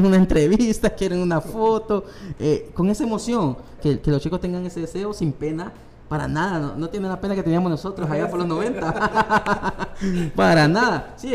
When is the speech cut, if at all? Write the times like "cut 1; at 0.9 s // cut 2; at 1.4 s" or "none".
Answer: cut 1; at 3.8 s

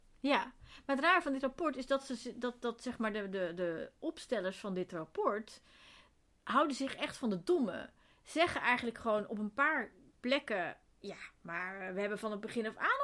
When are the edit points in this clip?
none

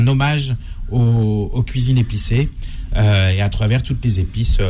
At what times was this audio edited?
none

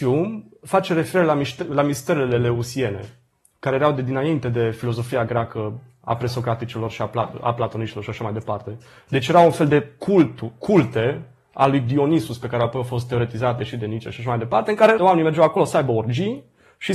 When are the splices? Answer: cut 1; at 15.0 s

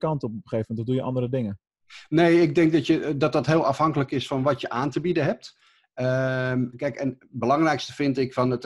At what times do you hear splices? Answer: none

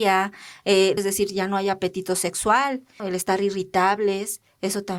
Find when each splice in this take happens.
cut 1; at 1.0 s // cut 2; at 3.0 s

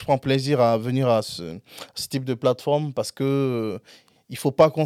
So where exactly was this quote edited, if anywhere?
none

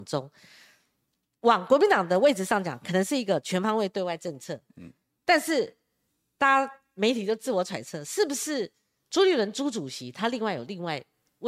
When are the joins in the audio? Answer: none

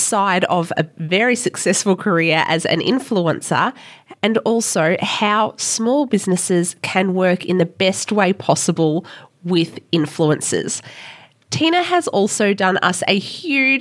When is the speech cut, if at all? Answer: none

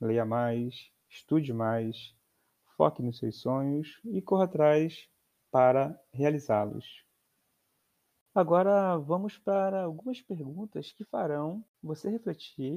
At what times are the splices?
none

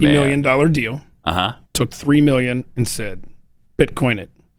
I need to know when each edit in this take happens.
cut 1; at 1.6 s

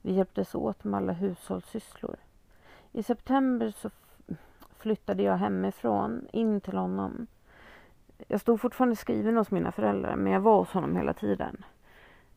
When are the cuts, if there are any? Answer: cut 1; at 3.7 s

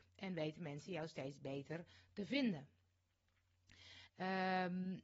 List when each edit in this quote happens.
cut 1; at 4.1 s

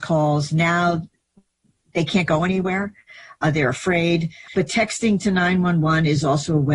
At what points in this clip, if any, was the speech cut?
cut 1; at 3.4 s // cut 2; at 4.5 s

